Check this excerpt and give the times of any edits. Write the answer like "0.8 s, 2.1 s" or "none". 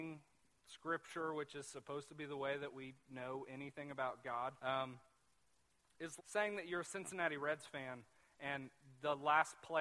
4.6 s, 6.2 s